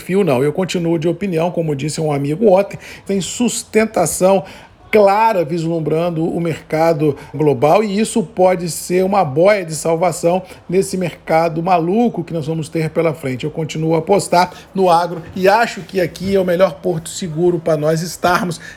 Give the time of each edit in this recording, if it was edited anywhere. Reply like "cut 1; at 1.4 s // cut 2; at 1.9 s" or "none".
cut 1; at 3.1 s // cut 2; at 7.3 s